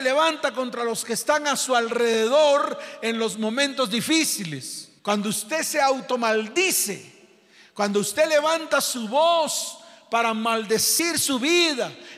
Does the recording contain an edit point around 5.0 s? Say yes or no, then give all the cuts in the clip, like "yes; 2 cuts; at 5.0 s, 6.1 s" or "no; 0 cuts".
yes; 1 cut; at 5.0 s